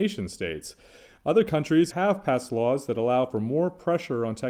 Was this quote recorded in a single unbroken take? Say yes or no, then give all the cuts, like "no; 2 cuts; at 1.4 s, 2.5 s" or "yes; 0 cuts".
no; 1 cut; at 1.9 s